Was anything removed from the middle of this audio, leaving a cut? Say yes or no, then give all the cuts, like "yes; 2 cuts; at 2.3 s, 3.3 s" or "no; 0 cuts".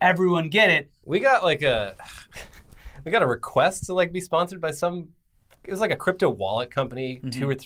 yes; 1 cut; at 1.0 s